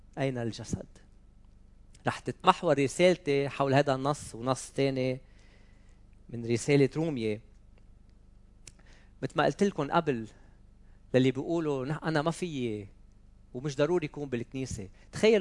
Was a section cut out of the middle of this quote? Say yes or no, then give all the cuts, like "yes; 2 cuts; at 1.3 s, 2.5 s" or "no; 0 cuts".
no; 0 cuts